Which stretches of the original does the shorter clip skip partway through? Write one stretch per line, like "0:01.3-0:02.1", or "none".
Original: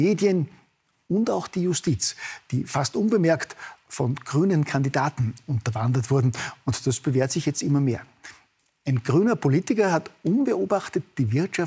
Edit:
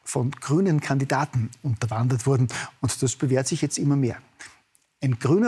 none